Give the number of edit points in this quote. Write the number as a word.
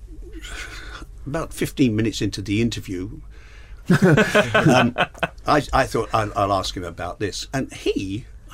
one